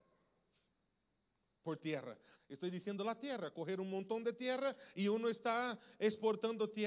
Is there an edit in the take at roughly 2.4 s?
yes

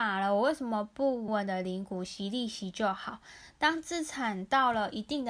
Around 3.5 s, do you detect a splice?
no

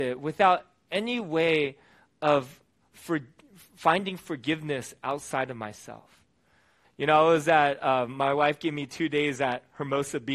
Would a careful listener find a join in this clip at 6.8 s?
yes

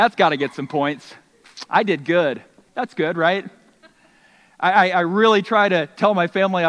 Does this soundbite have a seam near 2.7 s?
yes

